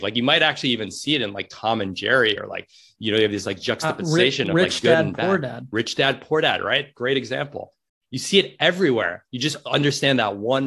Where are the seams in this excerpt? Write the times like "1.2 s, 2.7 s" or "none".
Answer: none